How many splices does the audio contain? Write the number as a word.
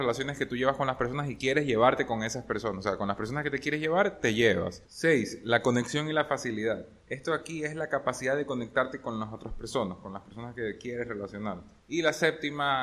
one